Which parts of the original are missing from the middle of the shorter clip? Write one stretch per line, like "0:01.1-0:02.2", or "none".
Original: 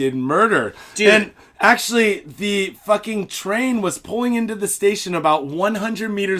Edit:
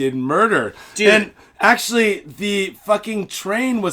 none